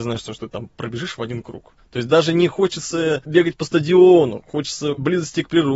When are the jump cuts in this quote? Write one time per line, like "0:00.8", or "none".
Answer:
0:01.8